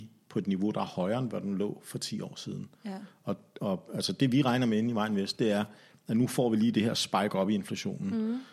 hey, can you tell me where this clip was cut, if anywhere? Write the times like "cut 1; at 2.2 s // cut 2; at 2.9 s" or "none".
none